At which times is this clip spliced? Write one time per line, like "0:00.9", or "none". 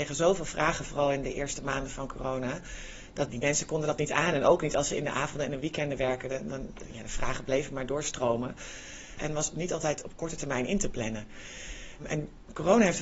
0:03.3
0:09.2

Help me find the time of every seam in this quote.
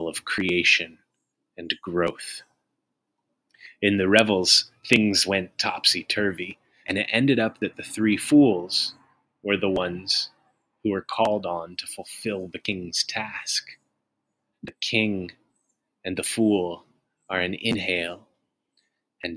0:06.8
0:14.5

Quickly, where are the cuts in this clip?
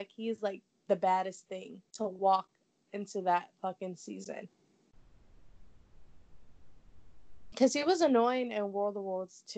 0:01.9

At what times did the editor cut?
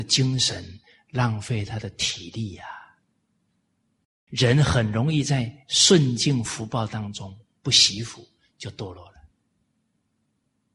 0:04.3

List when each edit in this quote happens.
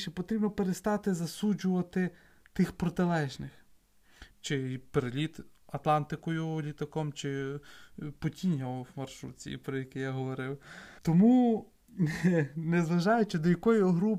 0:04.3
0:11.0

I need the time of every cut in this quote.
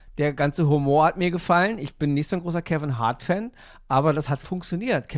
none

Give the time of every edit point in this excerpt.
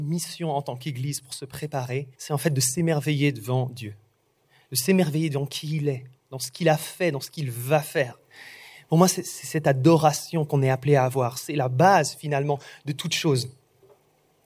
0:02.1

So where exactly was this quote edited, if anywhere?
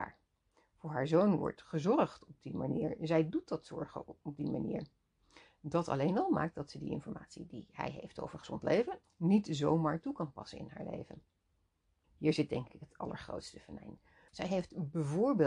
0:09.0
0:12.0
0:14.3

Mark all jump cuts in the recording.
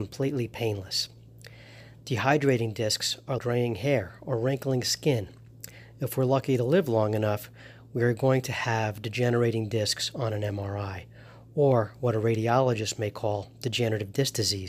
0:03.4

